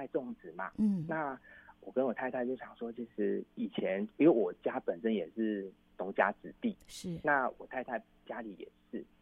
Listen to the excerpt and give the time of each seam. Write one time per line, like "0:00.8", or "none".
none